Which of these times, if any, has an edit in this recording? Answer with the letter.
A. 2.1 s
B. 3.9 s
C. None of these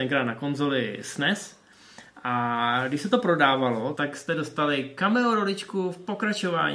B